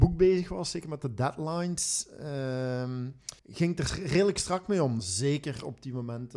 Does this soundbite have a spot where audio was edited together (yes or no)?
yes